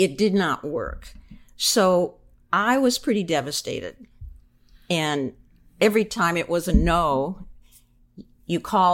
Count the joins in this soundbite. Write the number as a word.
zero